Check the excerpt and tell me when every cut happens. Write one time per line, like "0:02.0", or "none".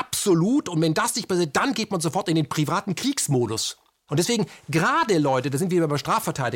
0:04.1